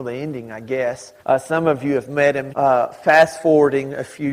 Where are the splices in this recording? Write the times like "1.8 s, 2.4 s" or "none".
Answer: 1.2 s, 2.5 s